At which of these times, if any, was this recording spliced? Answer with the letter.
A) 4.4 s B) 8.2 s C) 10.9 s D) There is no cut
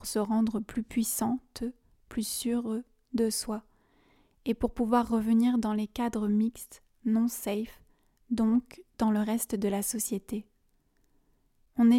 D